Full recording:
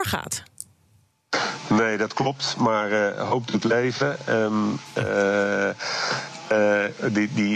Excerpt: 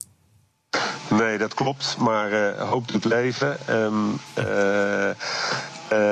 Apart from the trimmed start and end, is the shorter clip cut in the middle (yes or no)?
no